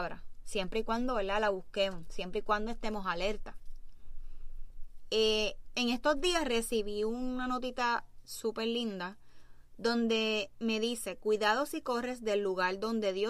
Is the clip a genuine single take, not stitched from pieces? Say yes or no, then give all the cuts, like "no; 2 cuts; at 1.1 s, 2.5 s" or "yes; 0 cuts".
yes; 0 cuts